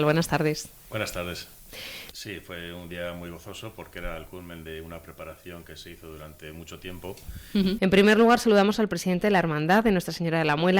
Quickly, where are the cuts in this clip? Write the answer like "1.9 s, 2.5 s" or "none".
2.1 s, 7.8 s